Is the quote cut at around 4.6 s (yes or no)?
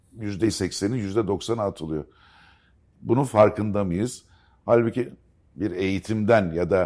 yes